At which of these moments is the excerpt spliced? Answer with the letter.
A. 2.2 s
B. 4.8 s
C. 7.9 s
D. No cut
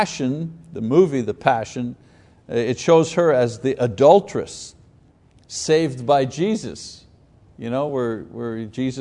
D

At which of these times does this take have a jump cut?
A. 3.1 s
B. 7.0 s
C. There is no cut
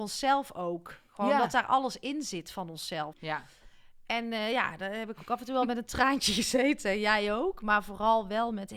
A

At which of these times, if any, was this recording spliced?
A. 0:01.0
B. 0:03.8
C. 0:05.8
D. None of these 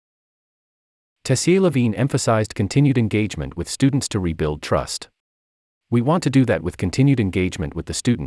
C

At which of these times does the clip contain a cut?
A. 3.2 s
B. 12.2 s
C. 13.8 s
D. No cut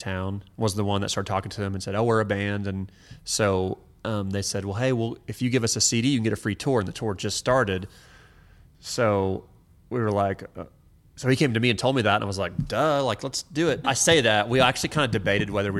C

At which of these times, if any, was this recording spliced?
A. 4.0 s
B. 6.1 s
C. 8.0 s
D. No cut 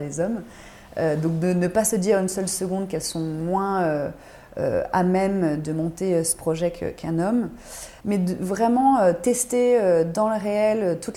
C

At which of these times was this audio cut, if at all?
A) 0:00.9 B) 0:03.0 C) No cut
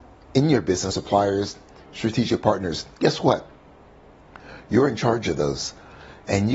A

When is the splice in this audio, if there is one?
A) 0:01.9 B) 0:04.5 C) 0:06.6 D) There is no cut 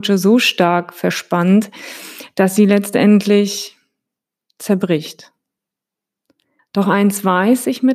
C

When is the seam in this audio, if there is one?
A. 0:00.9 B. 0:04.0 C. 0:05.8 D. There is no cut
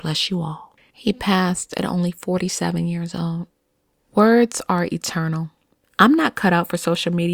C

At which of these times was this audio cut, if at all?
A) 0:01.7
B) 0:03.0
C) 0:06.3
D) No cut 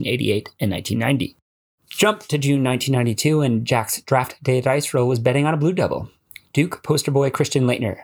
D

